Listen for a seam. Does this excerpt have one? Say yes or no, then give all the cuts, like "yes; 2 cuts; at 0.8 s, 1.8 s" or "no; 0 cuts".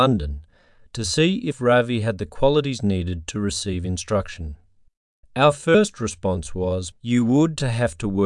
yes; 2 cuts; at 5.2 s, 6.9 s